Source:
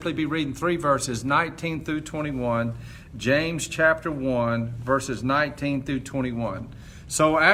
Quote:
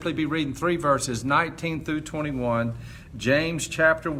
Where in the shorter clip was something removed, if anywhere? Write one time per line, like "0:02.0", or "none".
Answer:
none